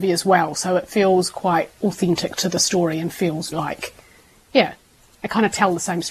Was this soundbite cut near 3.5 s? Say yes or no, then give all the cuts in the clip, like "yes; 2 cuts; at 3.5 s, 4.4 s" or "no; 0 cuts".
yes; 1 cut; at 3.5 s